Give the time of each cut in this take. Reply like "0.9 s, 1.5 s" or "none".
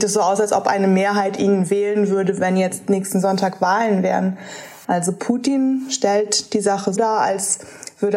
4.8 s, 7.0 s